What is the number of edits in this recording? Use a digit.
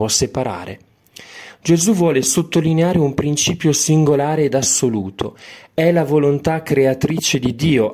0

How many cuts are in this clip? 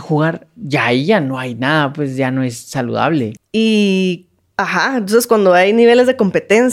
1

